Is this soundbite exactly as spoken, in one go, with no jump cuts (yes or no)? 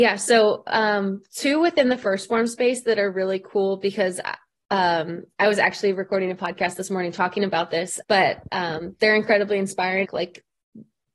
no